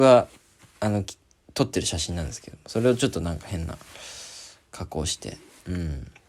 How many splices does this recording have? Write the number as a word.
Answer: zero